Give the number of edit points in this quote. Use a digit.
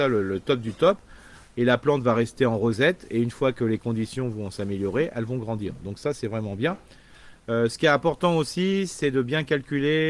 0